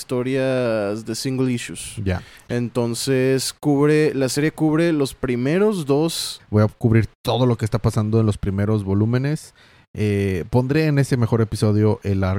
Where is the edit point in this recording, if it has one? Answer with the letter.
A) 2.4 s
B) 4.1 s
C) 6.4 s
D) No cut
C